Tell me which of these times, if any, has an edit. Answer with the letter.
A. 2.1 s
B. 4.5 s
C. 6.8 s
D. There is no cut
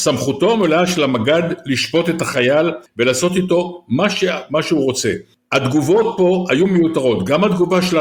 D